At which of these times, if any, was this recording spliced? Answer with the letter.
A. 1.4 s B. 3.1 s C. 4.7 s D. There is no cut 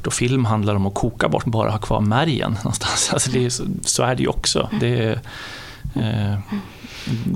A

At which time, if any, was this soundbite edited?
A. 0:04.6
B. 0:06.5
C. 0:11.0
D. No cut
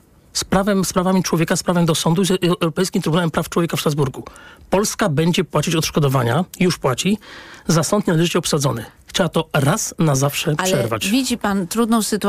D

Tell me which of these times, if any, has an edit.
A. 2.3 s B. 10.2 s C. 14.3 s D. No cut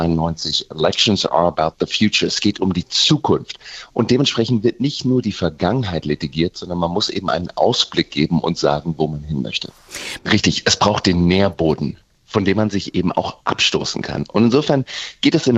B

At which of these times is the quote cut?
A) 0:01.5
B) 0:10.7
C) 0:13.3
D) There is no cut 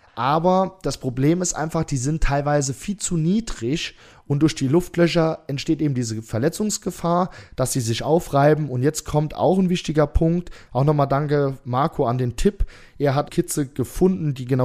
C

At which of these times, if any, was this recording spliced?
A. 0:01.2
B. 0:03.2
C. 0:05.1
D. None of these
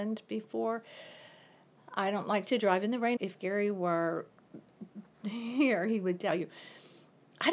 B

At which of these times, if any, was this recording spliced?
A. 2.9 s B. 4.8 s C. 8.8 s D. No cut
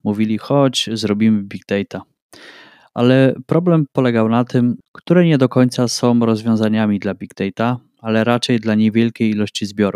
B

